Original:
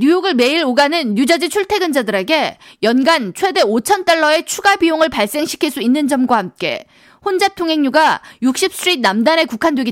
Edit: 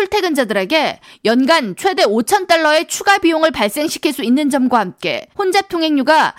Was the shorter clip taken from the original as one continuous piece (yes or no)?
no